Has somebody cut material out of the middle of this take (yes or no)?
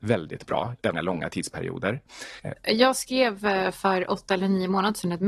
yes